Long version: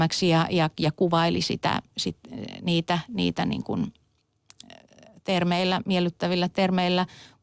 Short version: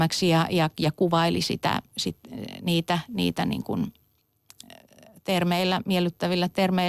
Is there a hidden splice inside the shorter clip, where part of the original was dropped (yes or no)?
no